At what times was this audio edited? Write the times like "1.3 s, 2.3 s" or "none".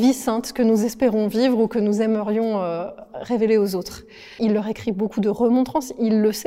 4.4 s